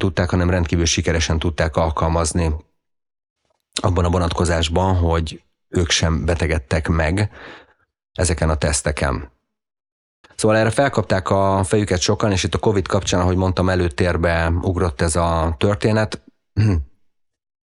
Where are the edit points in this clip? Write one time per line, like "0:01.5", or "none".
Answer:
none